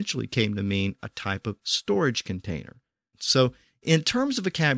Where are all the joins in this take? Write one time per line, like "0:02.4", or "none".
0:03.1